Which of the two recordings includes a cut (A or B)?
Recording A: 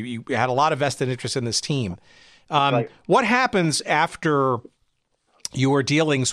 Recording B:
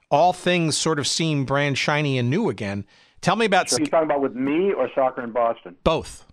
B